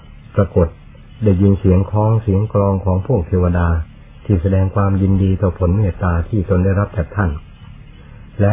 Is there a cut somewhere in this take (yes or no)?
no